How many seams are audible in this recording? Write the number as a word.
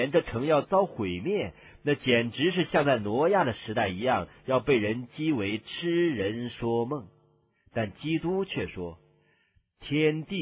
zero